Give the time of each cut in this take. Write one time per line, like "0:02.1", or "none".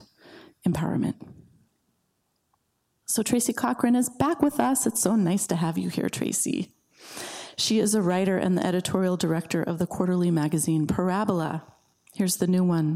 none